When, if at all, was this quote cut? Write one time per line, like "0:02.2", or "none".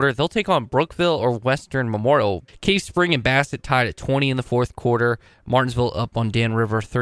0:02.5